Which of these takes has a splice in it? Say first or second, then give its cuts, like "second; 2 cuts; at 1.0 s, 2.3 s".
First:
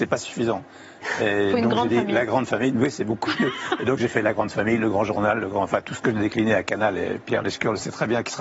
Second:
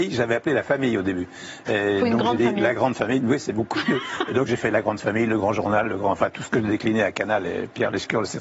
second; 1 cut; at 1.7 s